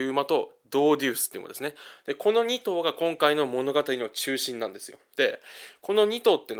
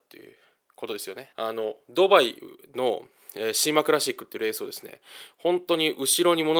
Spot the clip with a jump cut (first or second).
second